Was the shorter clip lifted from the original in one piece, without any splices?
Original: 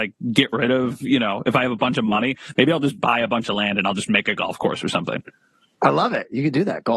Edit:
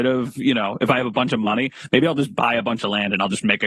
yes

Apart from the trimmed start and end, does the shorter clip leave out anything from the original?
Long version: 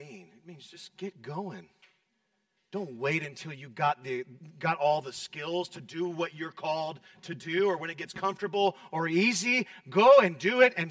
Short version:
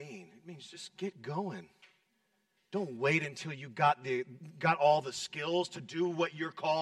no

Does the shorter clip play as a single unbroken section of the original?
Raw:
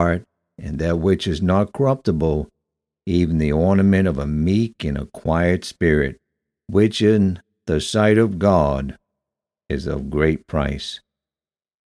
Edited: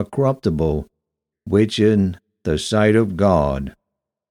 no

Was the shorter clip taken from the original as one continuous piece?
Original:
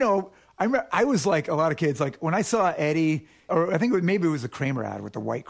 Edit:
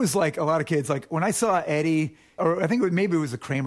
yes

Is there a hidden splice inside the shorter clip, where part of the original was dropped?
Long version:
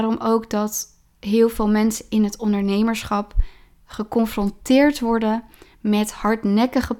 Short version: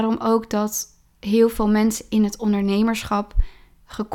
no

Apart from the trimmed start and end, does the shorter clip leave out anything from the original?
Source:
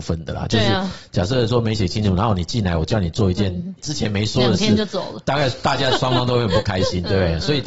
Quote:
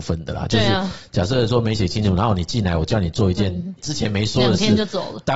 no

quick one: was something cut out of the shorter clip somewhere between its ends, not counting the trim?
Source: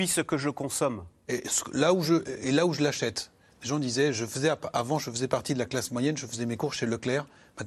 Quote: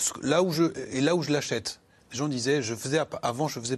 no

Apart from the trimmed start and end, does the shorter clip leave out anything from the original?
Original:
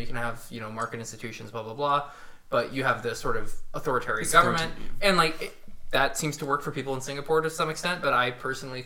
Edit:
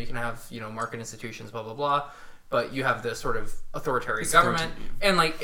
no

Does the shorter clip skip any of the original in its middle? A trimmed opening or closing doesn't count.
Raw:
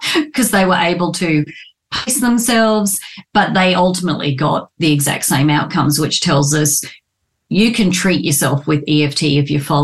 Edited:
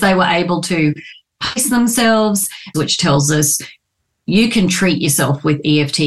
yes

